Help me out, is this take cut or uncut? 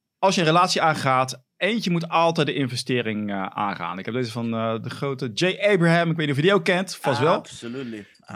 uncut